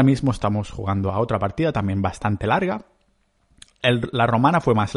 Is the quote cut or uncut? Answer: uncut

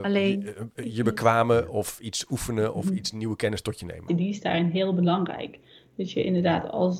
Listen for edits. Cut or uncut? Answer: cut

